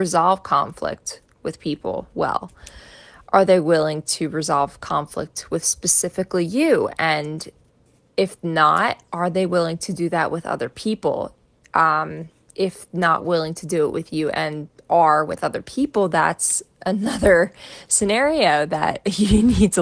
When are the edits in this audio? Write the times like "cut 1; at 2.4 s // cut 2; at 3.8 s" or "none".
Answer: none